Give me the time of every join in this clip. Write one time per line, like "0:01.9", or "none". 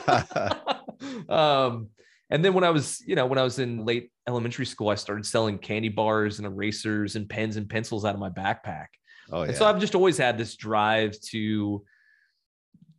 0:03.8

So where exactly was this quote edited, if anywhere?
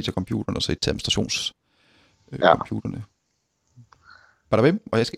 none

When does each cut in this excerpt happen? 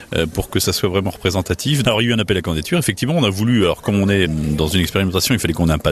0:01.8
0:04.2

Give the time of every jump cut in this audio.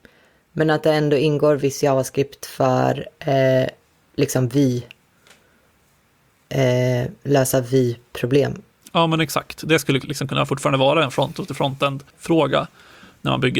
0:08.8
0:12.1

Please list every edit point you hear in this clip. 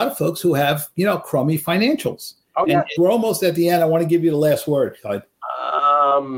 0:03.0

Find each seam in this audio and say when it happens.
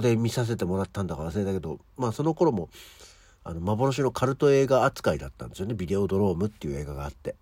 none

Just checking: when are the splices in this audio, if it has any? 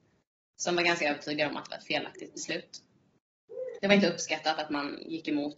0:03.8

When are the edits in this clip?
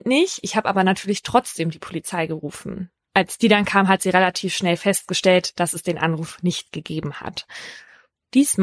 none

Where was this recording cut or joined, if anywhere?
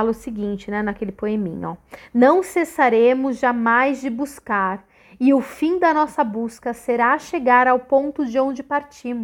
none

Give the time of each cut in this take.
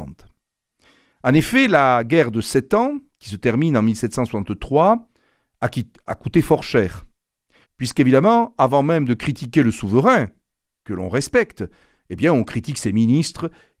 0:07.6

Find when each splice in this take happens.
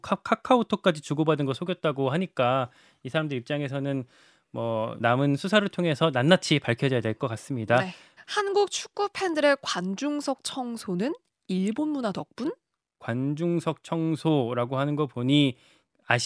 0:05.0
0:08.2

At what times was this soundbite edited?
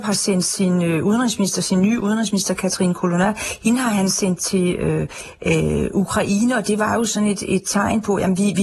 none

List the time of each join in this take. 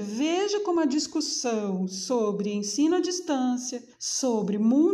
0:03.9

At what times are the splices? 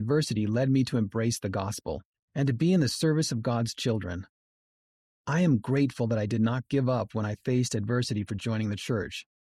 0:02.1

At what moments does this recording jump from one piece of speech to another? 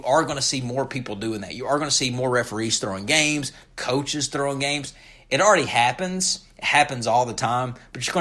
none

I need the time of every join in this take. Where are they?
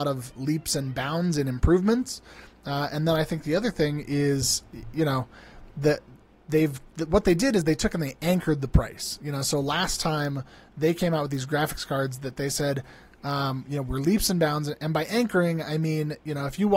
none

